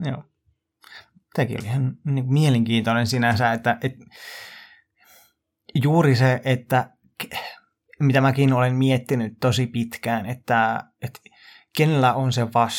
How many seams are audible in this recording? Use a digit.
0